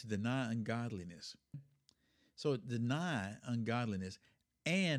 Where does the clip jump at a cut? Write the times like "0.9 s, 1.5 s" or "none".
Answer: 1.5 s